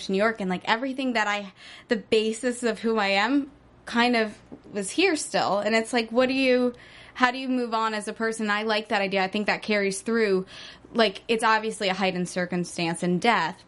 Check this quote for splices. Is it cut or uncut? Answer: uncut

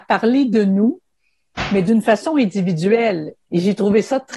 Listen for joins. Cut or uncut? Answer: cut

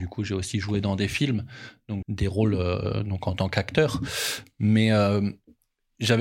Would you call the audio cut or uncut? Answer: cut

